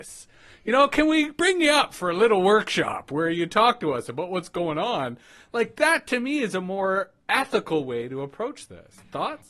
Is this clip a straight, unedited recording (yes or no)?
yes